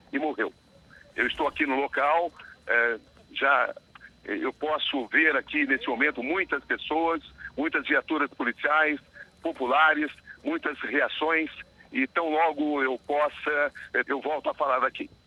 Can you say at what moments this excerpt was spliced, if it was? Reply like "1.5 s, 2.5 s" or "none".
14.0 s